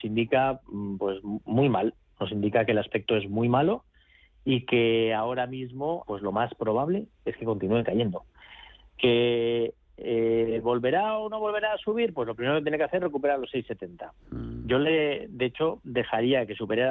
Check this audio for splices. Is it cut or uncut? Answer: cut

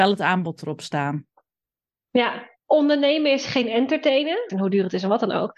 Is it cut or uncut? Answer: cut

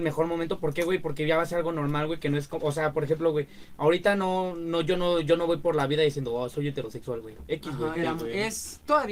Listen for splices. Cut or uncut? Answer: cut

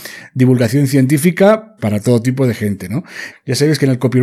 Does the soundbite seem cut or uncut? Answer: cut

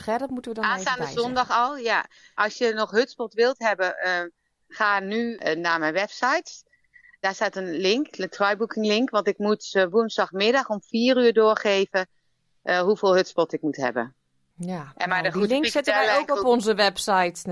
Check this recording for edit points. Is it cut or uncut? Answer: uncut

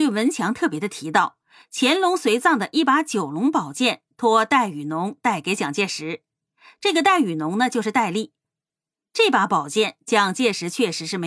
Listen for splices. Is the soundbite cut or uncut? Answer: uncut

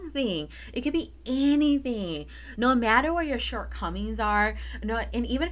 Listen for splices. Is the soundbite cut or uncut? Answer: cut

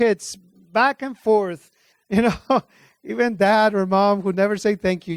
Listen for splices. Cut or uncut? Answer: cut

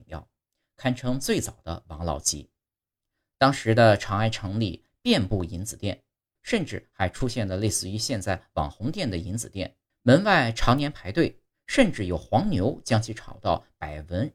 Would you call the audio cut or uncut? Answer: cut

